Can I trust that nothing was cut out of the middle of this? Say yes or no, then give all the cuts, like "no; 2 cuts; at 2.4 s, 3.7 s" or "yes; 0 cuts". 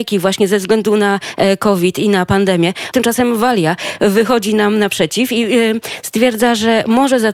no; 1 cut; at 2.9 s